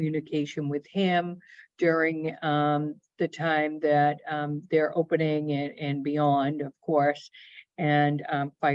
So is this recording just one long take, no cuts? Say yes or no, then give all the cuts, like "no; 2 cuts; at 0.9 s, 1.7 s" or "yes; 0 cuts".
yes; 0 cuts